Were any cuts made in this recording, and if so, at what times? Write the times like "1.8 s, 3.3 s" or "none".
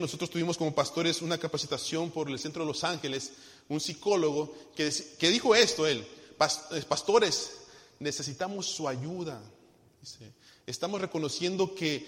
none